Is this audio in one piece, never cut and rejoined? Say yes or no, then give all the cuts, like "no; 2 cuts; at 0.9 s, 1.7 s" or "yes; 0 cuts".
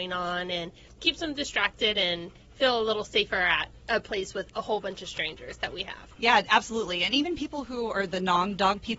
no; 1 cut; at 6.2 s